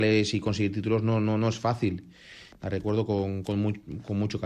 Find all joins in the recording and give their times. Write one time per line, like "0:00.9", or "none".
0:02.5